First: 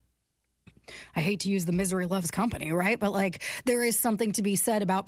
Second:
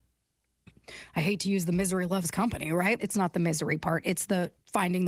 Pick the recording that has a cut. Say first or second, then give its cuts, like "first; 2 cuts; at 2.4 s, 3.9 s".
second; 1 cut; at 3.0 s